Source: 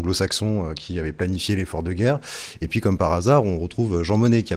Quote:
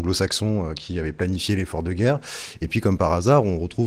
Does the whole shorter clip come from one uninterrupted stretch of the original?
yes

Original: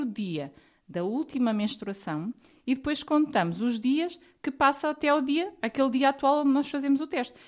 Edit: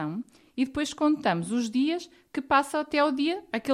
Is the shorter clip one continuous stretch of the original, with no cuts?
yes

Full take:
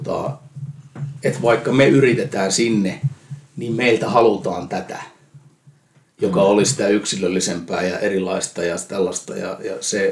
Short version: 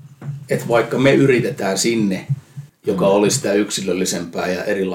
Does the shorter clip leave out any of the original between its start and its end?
yes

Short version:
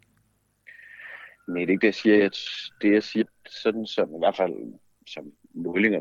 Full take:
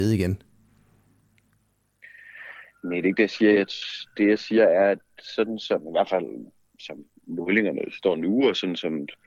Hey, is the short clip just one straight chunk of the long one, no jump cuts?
no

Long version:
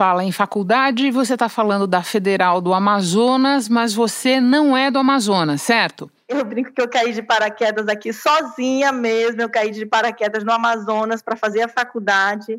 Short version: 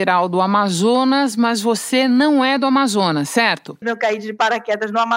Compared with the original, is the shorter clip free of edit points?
no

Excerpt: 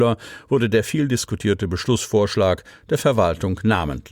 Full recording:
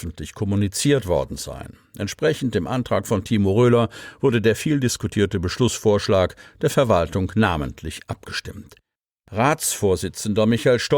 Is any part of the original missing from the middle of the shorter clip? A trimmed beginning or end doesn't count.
no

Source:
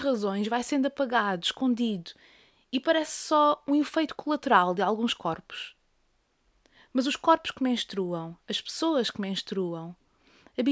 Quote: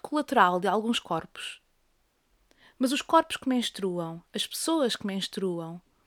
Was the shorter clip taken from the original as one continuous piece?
yes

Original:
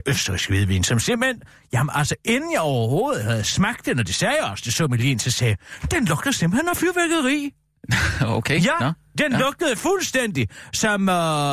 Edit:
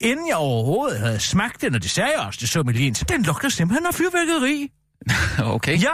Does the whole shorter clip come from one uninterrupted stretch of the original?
no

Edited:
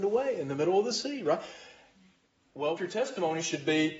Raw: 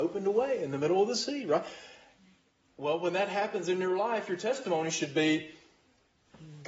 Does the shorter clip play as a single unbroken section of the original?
no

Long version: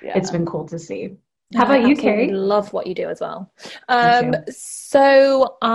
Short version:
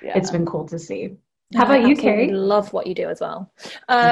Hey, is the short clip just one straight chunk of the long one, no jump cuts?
yes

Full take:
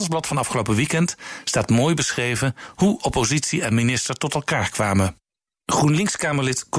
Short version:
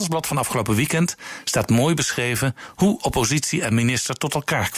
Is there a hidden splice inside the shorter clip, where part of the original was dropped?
no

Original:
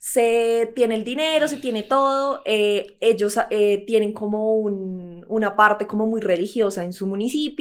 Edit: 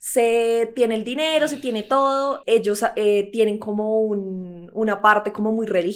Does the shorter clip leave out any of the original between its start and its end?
yes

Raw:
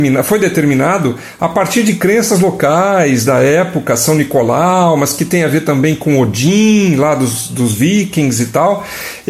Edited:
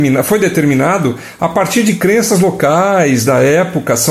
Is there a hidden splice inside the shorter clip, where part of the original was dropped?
no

